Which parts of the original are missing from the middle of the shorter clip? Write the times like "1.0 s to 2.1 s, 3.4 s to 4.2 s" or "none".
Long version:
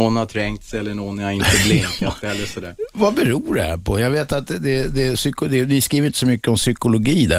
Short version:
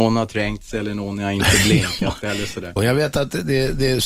2.8 s to 3.9 s